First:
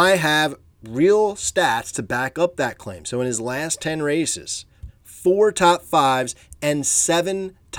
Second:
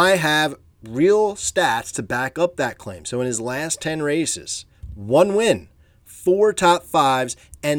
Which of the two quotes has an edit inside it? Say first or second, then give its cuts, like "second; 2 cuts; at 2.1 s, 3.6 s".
first; 1 cut; at 4.9 s